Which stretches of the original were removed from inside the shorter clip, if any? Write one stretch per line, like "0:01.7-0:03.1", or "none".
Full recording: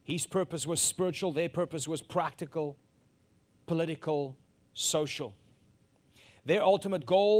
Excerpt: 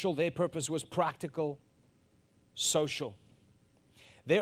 0:03.6-0:04.6